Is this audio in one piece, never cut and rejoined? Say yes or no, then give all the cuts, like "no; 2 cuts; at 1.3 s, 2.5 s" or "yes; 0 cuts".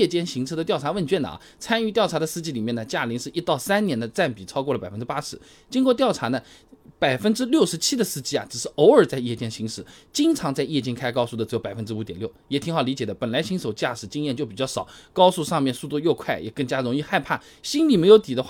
yes; 0 cuts